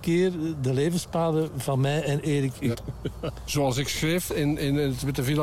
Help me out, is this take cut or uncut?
cut